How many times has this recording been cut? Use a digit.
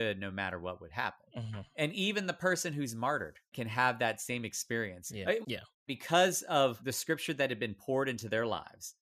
1